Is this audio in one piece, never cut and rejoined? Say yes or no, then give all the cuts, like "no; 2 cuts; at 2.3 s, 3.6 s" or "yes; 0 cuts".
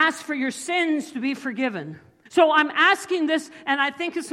no; 1 cut; at 2.3 s